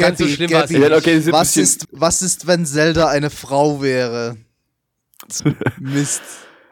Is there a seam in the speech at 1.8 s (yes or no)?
yes